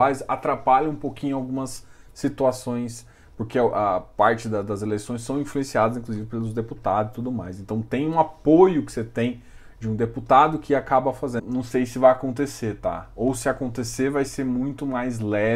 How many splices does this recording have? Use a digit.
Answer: 1